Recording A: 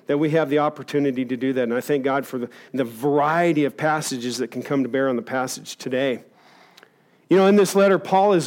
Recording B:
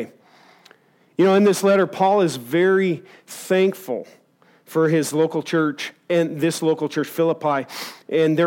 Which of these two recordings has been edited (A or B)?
A